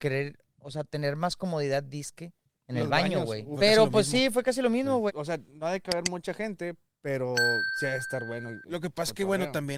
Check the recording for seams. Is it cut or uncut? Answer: cut